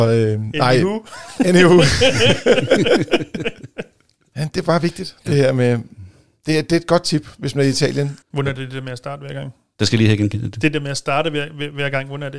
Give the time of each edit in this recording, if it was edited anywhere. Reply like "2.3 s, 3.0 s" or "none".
8.2 s

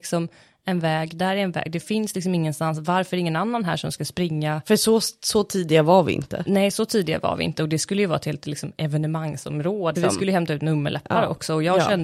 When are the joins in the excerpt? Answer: 9.9 s

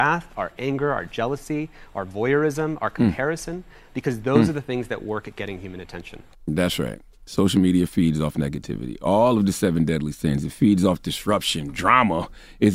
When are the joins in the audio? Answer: none

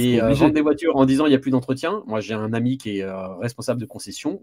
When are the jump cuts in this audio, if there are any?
none

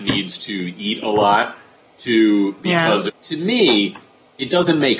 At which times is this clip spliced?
3.1 s

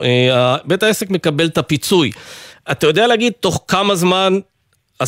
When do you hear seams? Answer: none

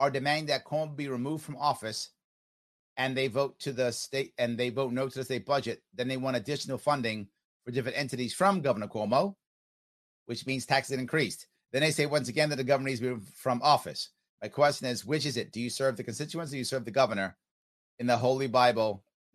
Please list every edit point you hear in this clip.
none

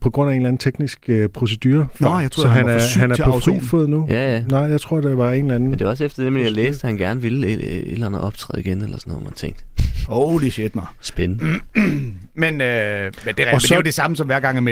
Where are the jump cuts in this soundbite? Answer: none

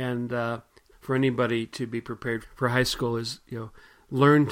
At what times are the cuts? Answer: 0.9 s, 2.4 s

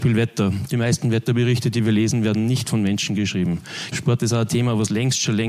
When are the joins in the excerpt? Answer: 3.9 s

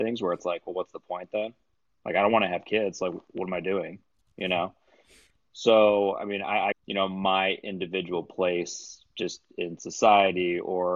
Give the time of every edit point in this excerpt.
6.7 s

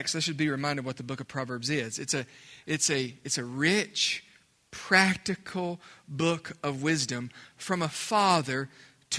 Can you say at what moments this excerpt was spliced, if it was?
none

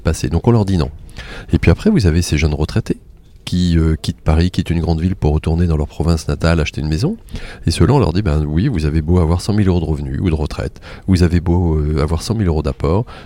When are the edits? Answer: none

